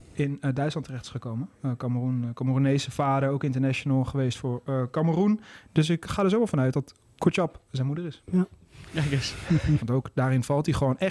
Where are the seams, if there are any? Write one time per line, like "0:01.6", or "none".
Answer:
0:05.6
0:09.8